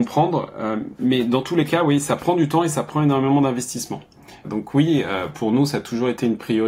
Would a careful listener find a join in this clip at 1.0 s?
no; 1 cut; at 4.4 s

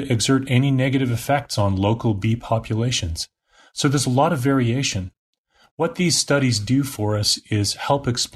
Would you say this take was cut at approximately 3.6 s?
no; 0 cuts

